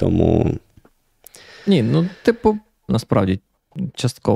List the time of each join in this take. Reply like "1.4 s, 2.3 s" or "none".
2.9 s